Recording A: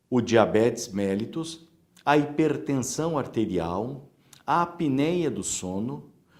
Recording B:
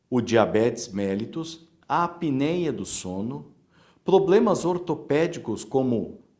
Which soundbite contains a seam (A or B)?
B